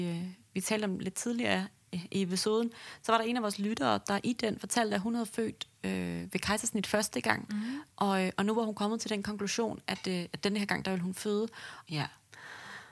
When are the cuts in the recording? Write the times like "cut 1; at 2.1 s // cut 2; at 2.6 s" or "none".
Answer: cut 1; at 7.9 s // cut 2; at 11.9 s